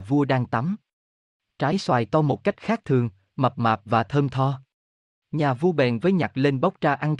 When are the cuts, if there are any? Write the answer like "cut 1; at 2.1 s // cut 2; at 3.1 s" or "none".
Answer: none